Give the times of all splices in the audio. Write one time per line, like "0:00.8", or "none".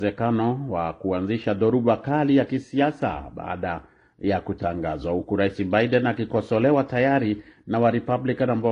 none